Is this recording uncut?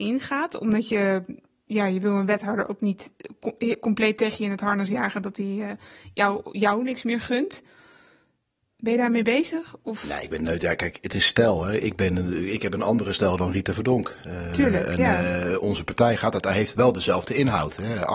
yes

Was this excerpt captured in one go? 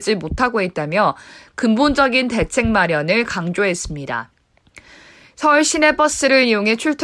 yes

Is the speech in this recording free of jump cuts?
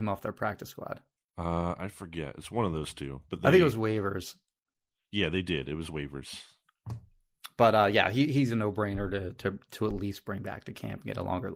yes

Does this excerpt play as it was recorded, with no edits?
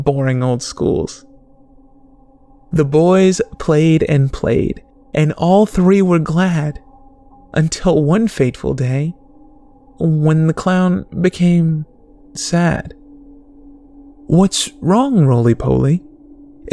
yes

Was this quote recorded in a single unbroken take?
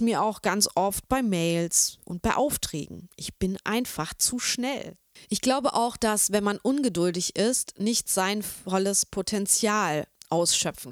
yes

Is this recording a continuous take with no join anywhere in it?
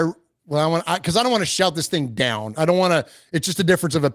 yes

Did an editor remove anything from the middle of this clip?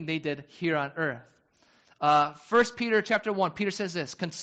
yes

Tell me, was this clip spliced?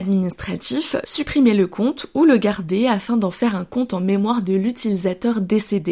yes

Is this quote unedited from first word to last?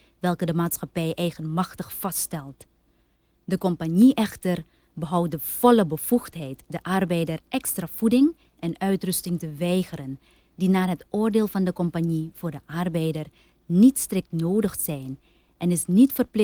yes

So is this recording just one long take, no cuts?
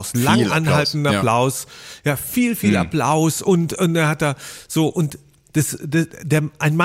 yes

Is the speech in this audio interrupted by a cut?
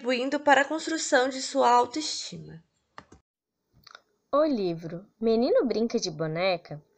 no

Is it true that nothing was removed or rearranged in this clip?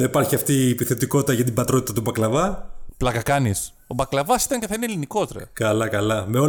yes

